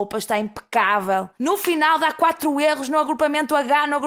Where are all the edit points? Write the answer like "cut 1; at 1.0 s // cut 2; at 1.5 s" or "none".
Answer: cut 1; at 1.4 s